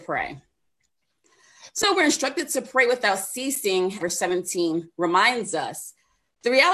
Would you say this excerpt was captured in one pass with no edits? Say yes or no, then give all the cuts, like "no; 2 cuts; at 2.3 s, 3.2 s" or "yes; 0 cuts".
no; 2 cuts; at 1.8 s, 4.0 s